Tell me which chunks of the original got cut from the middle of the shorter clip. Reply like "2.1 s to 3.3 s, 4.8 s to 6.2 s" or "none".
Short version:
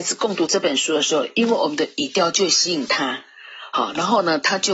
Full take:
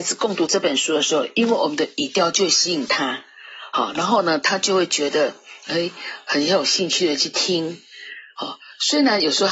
none